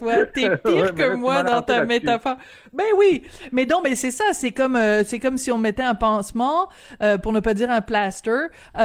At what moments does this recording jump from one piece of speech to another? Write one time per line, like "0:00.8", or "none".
none

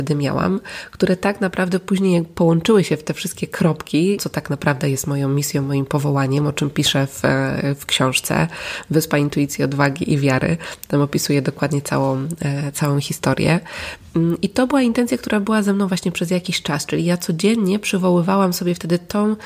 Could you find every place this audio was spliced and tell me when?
0:04.2

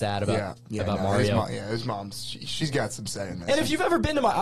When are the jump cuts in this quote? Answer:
none

